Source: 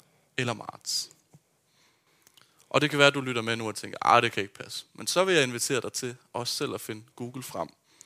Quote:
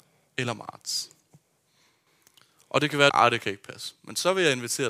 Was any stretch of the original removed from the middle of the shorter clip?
yes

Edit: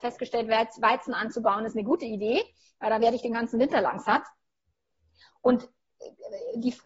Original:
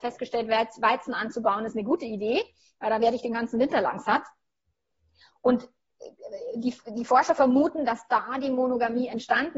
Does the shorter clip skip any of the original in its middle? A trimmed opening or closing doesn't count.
no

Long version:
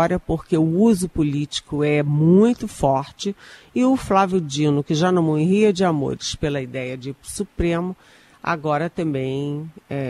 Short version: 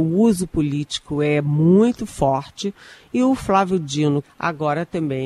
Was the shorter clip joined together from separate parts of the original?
yes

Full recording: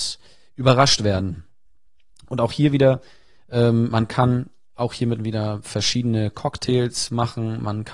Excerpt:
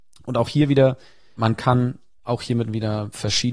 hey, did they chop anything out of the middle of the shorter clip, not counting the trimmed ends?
yes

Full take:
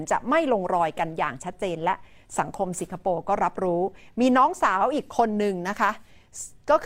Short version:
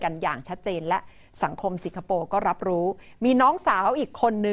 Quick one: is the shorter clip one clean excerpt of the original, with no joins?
yes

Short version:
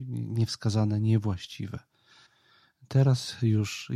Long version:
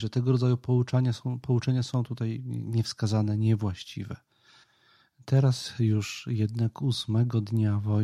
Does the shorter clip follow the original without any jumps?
yes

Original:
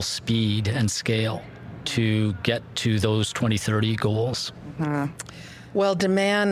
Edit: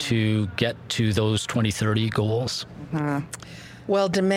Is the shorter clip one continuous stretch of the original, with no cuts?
yes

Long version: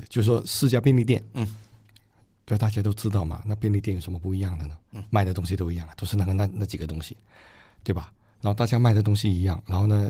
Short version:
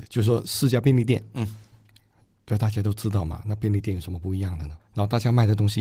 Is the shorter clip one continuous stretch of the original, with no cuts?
no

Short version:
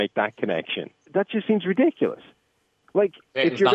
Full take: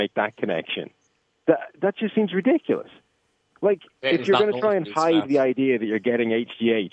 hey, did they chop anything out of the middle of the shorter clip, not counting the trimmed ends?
yes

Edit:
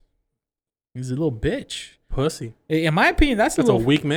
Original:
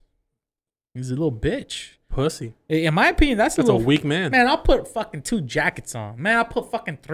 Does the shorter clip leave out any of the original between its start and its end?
no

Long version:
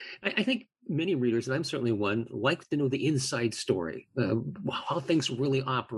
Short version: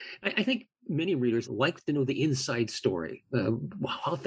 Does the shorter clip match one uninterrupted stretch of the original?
no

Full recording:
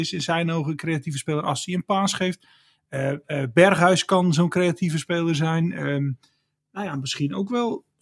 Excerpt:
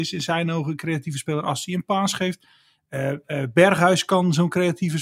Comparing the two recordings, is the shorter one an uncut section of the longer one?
yes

